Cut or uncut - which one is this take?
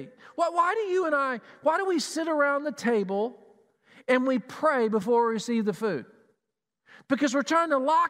uncut